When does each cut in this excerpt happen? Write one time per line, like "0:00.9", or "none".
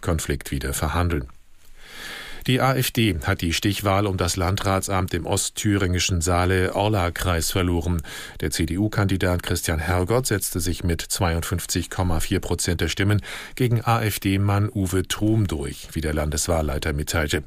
none